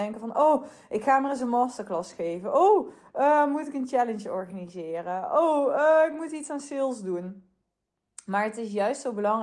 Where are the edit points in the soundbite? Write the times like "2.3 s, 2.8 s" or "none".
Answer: none